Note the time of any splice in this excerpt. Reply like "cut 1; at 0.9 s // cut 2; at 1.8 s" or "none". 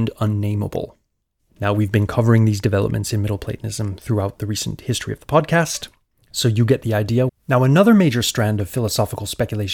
cut 1; at 7.3 s